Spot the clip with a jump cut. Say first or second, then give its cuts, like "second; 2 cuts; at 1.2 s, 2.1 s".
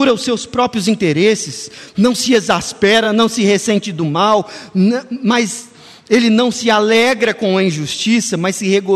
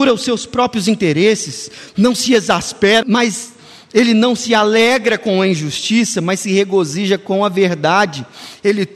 second; 1 cut; at 3.0 s